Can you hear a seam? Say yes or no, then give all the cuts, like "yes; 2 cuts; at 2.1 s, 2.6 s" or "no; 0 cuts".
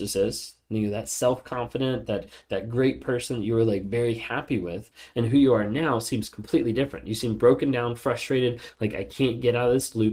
no; 0 cuts